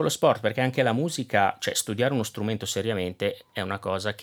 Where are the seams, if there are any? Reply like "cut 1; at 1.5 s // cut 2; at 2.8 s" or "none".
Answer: none